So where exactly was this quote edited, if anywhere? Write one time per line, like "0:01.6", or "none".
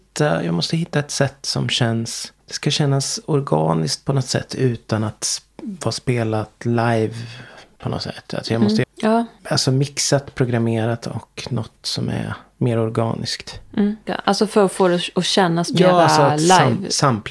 0:08.8
0:14.1